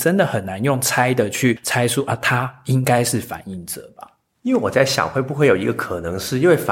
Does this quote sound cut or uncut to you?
uncut